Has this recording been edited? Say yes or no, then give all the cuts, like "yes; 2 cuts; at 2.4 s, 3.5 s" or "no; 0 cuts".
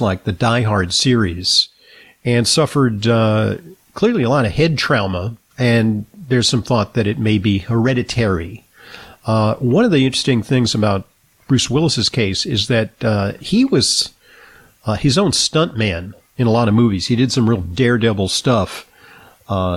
yes; 1 cut; at 5.5 s